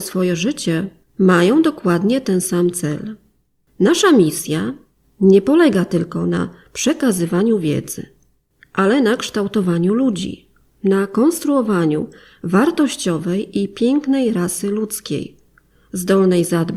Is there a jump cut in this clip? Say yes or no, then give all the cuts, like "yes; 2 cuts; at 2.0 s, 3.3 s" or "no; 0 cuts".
yes; 2 cuts; at 1.0 s, 3.7 s